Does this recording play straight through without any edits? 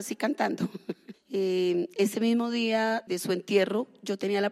no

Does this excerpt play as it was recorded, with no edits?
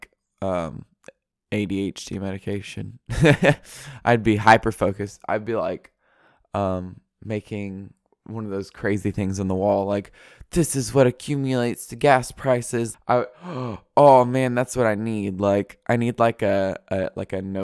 no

